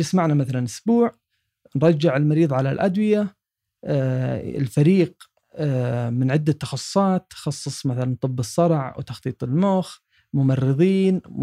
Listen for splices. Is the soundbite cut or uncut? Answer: uncut